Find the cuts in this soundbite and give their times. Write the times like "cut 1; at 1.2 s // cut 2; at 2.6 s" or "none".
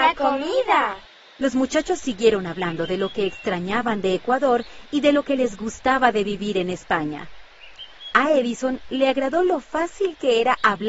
none

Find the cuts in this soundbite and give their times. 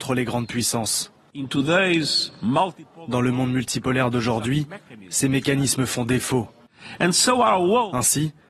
none

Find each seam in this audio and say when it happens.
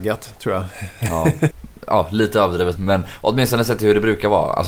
cut 1; at 1.5 s // cut 2; at 2.8 s

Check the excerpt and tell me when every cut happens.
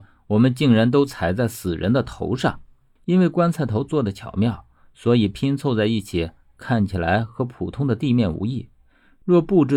cut 1; at 3.0 s

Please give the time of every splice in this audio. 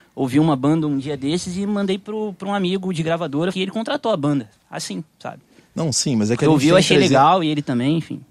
cut 1; at 3.5 s

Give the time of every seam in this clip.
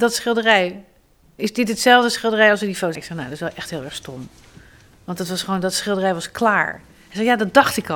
cut 1; at 3.0 s

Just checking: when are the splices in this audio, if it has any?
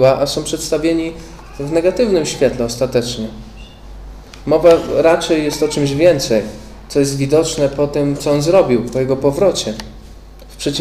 none

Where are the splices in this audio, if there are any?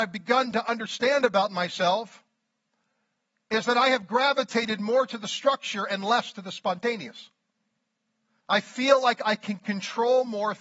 cut 1; at 8.4 s

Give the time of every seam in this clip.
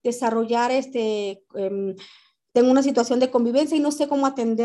none

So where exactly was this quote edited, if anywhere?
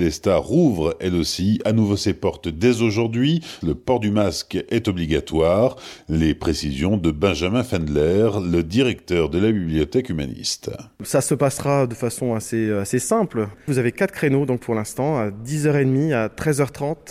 cut 1; at 3.6 s

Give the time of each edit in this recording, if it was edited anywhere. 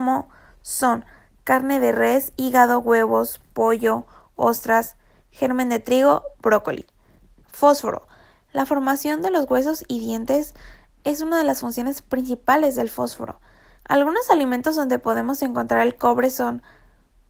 cut 1; at 7.4 s // cut 2; at 13.8 s

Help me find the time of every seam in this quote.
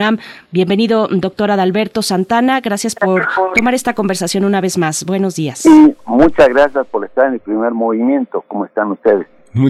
none

